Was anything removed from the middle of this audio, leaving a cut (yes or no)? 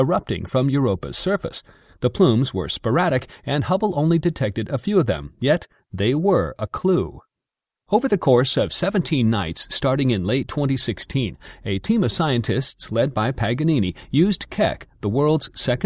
no